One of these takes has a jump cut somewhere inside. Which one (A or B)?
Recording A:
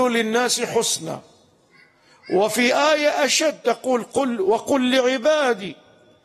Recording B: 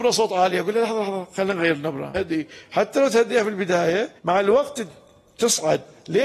B